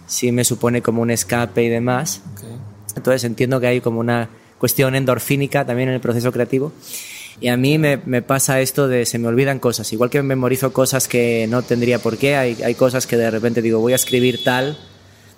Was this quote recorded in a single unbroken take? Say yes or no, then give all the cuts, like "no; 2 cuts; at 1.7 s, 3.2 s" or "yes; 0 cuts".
no; 2 cuts; at 3.0 s, 7.4 s